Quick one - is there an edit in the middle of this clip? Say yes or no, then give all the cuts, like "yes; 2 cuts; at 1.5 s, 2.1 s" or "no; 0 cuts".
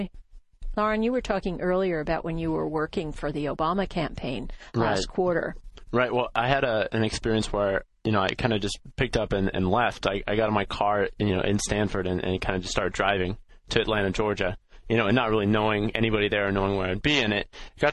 no; 0 cuts